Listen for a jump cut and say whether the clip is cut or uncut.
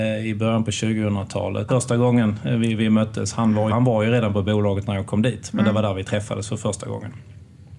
cut